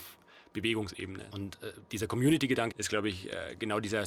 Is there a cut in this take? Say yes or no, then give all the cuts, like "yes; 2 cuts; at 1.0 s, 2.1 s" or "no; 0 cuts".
yes; 2 cuts; at 1.3 s, 2.7 s